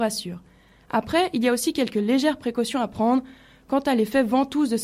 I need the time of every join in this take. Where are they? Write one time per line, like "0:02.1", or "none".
none